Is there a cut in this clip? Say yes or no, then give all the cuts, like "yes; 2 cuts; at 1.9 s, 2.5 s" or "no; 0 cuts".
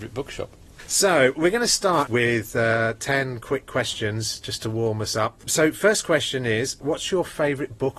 yes; 1 cut; at 2.1 s